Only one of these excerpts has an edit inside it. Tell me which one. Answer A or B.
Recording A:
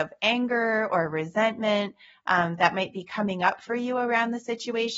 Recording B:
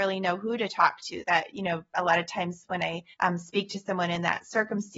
B